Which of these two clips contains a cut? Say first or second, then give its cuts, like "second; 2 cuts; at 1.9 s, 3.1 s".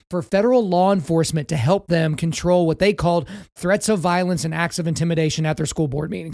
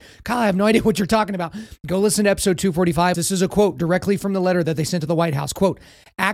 second; 1 cut; at 3.1 s